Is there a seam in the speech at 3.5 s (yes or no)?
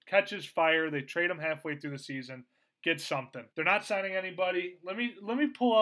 yes